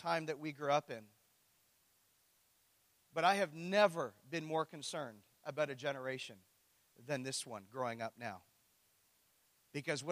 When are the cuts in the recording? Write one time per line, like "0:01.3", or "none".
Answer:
none